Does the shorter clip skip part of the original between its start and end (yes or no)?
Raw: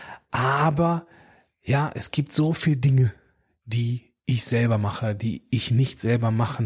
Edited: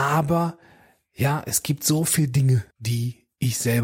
yes